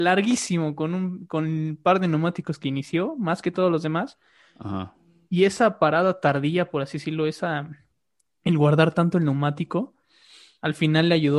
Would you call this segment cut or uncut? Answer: uncut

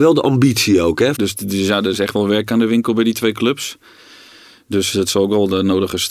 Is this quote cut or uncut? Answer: cut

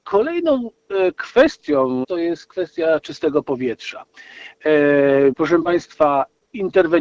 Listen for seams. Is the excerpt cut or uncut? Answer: cut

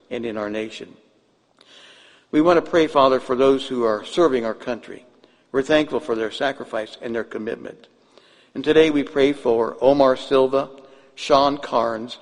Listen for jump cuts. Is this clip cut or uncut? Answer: uncut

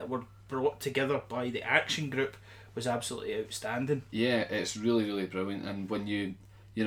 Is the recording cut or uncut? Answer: uncut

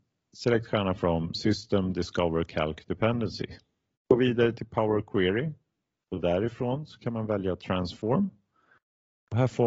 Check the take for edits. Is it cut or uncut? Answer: cut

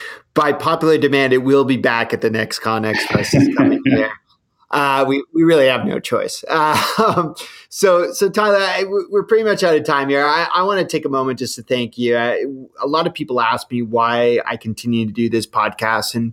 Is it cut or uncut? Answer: uncut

